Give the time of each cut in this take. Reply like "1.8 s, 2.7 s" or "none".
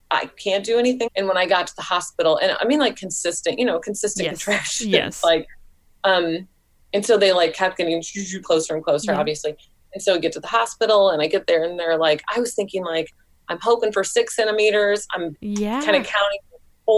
1.1 s, 8.4 s